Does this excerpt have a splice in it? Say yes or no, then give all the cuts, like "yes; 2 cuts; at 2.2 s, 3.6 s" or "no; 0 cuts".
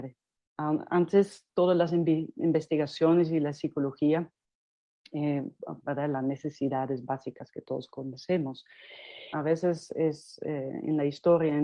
yes; 2 cuts; at 5.8 s, 9.3 s